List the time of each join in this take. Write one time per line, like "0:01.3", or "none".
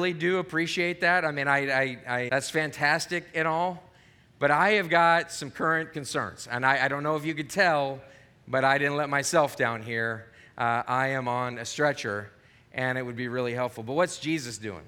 0:02.3